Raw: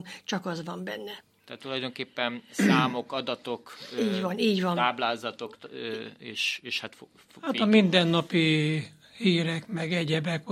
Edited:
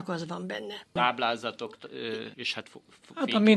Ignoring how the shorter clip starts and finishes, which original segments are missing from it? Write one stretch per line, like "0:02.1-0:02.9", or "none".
0:01.3-0:04.8
0:06.1-0:06.6